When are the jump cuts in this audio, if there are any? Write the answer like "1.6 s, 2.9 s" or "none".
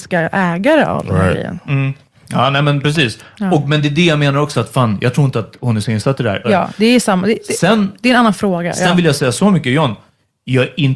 4.5 s, 6.4 s

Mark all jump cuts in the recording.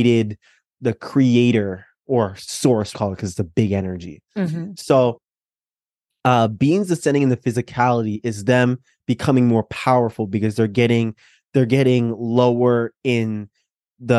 2.9 s

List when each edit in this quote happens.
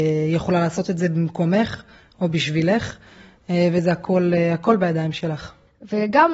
none

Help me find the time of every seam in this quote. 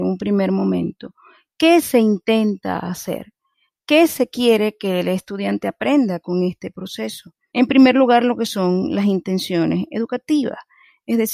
7.5 s

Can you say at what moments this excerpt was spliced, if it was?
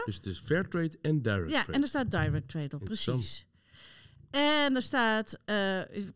none

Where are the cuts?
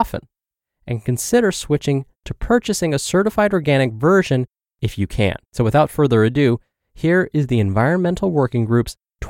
5.4 s

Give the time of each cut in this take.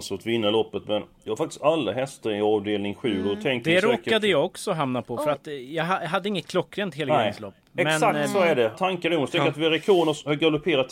8.7 s

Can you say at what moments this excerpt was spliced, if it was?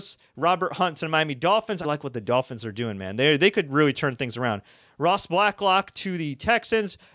1.8 s

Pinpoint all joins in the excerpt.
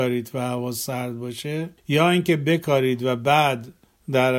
1.8 s

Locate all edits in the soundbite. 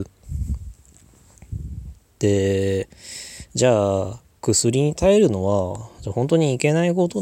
none

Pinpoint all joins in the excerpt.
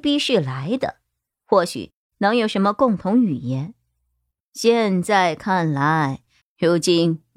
6.4 s

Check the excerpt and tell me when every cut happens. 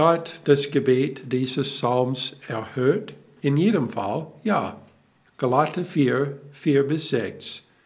none

